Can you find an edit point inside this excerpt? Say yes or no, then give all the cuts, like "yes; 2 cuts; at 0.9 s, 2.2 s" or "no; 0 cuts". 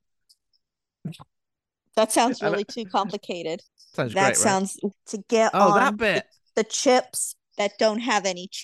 yes; 2 cuts; at 3.7 s, 4.9 s